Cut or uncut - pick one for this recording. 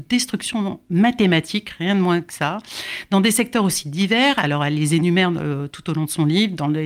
uncut